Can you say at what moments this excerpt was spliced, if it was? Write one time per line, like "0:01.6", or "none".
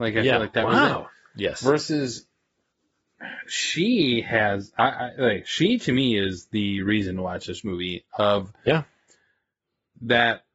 none